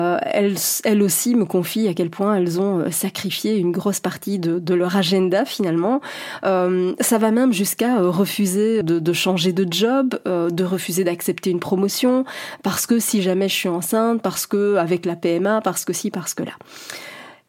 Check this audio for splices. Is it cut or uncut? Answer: cut